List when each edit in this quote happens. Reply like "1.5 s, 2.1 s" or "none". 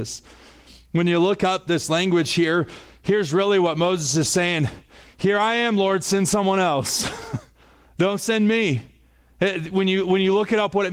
none